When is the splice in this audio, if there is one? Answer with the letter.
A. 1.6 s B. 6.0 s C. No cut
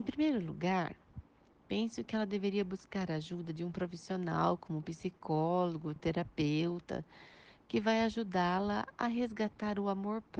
C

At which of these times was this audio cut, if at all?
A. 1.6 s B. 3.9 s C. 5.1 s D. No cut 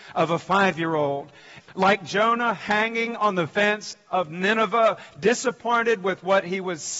A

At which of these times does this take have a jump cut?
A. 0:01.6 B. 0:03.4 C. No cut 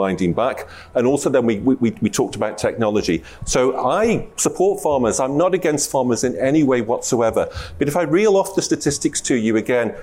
B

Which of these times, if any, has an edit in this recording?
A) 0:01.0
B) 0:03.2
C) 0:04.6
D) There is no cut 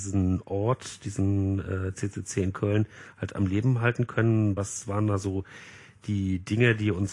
D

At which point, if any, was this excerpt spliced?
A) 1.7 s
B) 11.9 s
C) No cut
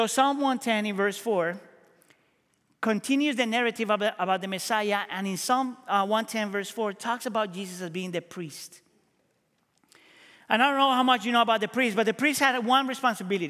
C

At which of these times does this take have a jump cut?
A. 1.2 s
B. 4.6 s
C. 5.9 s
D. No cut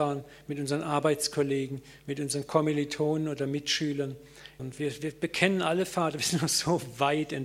B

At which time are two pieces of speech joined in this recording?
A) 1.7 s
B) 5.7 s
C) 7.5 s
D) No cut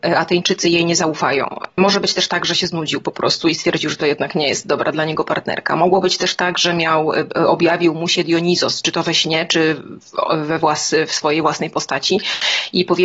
D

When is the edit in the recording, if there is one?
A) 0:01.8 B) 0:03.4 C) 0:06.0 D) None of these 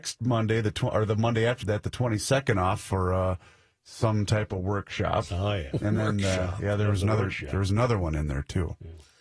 D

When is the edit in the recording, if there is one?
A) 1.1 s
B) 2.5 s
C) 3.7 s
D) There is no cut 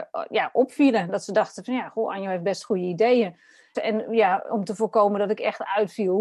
C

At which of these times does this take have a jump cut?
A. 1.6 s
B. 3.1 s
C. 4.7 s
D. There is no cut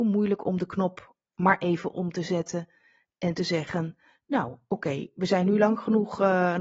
D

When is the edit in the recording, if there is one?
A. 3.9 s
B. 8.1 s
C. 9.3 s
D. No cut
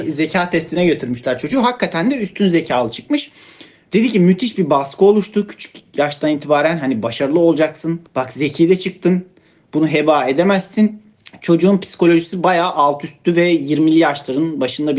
B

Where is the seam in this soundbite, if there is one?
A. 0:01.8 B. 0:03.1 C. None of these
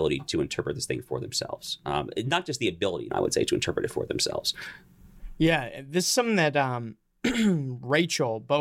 B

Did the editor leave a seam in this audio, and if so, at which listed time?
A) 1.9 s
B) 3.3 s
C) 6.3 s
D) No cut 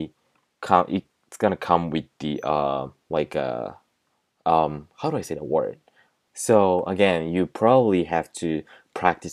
C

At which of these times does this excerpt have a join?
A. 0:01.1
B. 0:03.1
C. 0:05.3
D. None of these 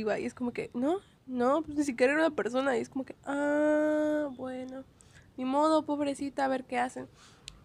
D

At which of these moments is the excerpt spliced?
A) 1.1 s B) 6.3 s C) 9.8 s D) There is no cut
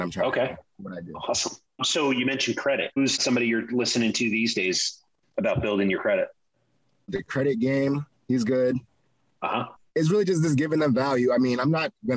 C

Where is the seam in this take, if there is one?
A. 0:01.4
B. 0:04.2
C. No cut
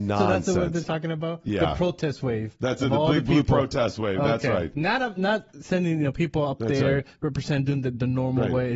C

